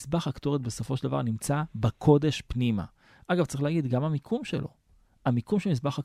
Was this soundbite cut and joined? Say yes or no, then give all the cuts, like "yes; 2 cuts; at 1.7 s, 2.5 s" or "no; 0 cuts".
no; 0 cuts